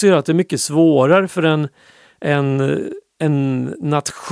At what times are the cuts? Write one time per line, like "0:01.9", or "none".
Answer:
none